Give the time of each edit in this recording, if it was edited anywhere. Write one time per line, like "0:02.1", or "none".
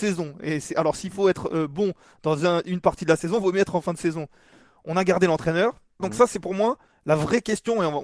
0:06.0